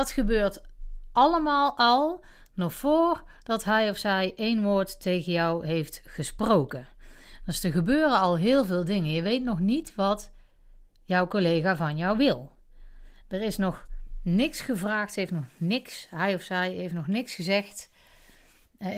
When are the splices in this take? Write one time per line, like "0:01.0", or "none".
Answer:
none